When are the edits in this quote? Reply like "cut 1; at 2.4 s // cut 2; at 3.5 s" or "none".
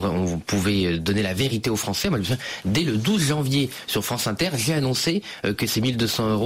none